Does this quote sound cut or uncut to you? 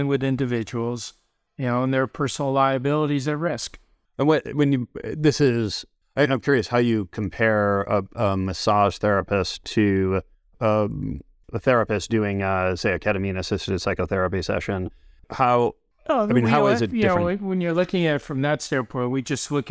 uncut